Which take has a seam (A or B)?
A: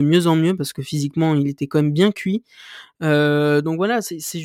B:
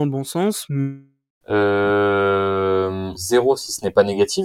B